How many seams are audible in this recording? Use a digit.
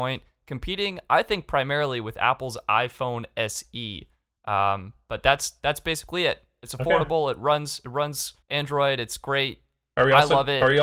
1